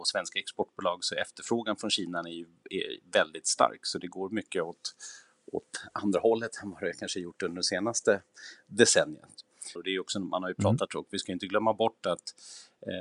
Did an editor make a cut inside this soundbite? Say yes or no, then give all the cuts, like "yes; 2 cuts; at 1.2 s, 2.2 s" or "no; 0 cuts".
yes; 2 cuts; at 9.8 s, 10.9 s